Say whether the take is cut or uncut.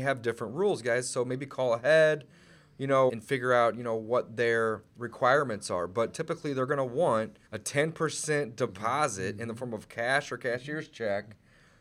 cut